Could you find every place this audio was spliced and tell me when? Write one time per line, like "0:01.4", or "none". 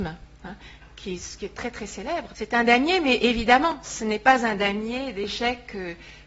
0:02.3

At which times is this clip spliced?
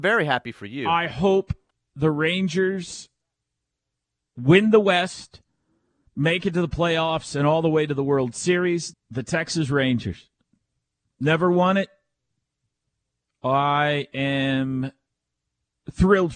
0:08.9
0:13.2

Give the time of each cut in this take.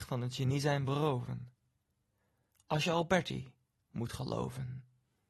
none

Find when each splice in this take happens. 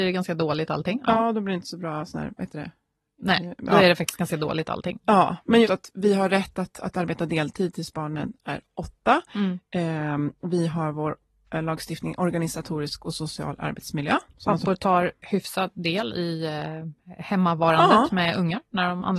0:05.6

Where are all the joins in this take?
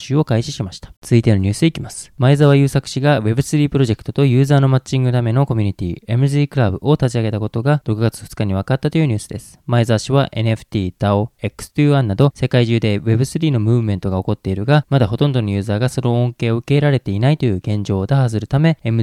0:01.0

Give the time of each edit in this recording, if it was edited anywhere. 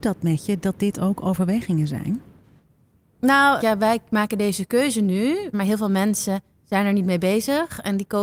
0:03.6
0:05.5

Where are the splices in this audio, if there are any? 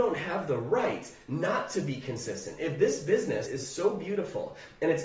0:03.5

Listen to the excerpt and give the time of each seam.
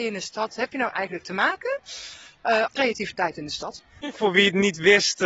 0:02.7
0:04.0

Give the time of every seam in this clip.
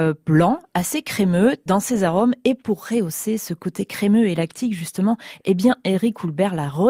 0:01.7

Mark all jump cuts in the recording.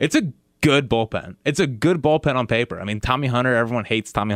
none

